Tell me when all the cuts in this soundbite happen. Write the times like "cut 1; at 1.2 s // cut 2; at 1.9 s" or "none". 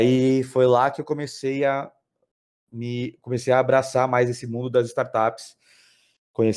none